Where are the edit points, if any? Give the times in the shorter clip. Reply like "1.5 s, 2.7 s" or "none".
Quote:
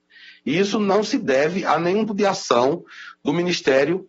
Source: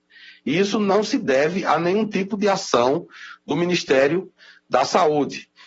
2.1 s